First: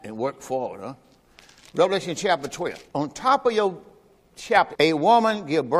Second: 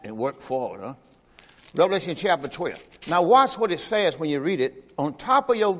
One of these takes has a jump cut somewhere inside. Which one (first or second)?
first